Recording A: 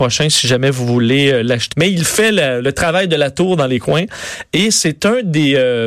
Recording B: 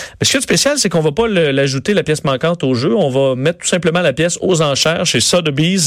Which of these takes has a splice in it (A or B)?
A